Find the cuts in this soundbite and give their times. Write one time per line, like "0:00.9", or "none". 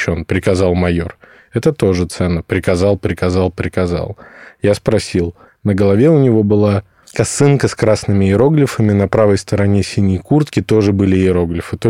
0:05.5